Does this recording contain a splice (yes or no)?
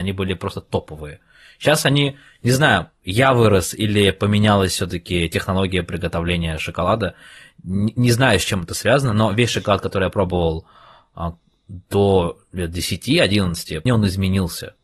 yes